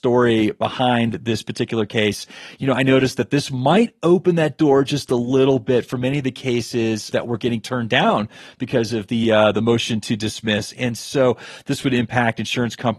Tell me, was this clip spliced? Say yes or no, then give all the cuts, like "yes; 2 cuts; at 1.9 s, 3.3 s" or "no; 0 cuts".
no; 0 cuts